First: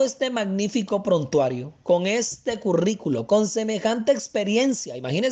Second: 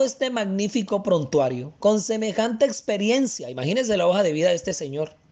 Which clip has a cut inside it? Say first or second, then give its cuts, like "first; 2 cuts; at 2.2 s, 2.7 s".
second; 1 cut; at 1.8 s